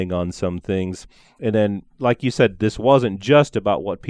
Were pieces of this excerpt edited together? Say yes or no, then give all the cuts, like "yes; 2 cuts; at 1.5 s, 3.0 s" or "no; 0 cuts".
no; 0 cuts